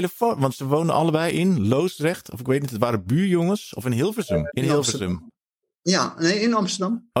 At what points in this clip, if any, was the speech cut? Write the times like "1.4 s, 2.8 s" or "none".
4.5 s

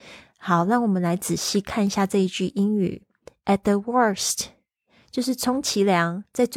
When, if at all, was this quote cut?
none

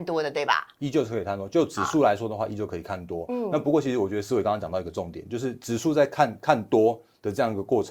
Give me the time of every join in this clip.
none

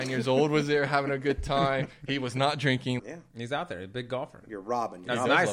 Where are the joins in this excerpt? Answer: 3.0 s

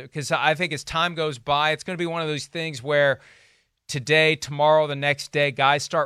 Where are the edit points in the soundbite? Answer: none

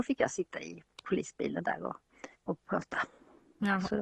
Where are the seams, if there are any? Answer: 2.3 s

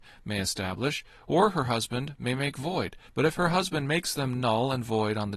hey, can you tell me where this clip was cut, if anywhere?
3.1 s

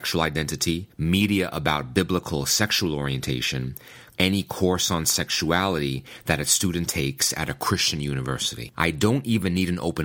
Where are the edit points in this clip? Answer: 4.1 s, 8.7 s

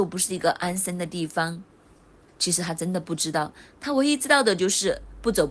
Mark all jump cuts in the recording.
2.3 s

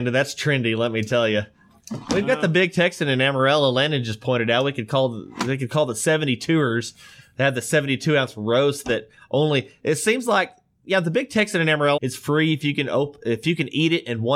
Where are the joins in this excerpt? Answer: 12.0 s

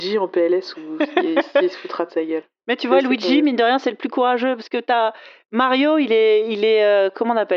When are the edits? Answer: none

